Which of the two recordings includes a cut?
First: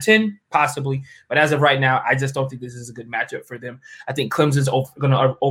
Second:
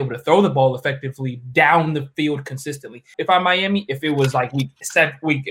second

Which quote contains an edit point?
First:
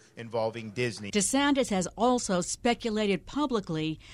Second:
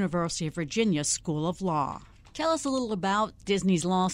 first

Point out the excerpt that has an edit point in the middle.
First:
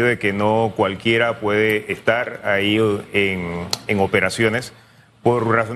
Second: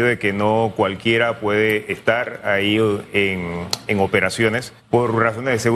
second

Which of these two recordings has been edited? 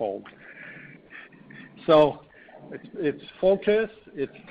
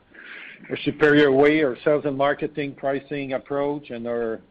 first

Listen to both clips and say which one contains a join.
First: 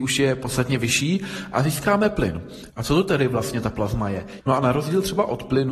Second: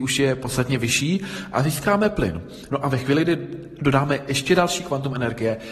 first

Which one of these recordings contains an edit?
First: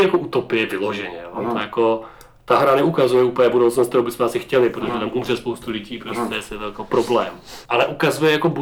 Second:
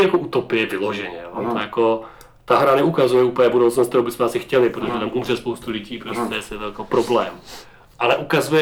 first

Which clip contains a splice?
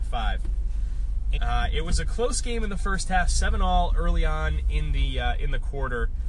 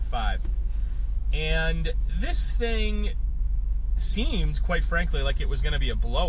first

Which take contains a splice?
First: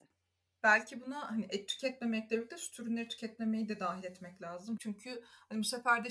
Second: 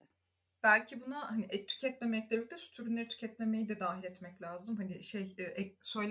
first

